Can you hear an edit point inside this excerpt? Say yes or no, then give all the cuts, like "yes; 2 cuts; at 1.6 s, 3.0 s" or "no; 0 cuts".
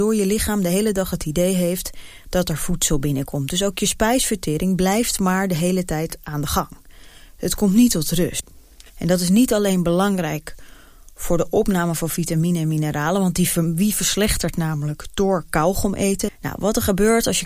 yes; 2 cuts; at 8.9 s, 16.3 s